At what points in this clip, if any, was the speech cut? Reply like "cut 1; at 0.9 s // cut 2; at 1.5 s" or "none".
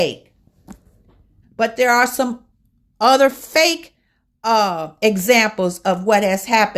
cut 1; at 1.4 s